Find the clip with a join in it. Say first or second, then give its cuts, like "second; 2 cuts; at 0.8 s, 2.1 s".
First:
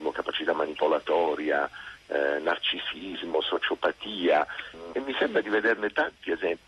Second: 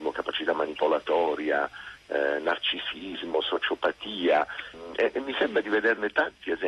first; 1 cut; at 4.9 s